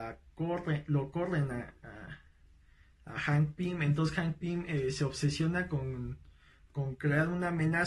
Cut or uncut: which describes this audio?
uncut